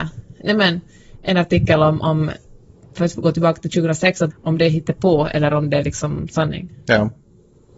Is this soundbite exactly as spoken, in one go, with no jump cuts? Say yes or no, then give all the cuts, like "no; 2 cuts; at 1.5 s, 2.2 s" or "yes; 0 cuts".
no; 1 cut; at 4.3 s